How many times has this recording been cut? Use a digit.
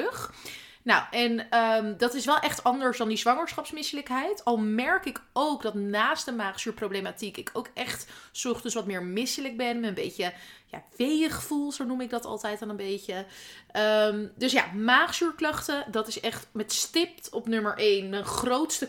0